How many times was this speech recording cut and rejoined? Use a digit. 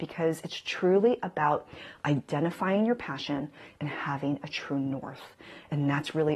0